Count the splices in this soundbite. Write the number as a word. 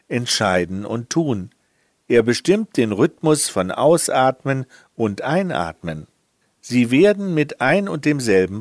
two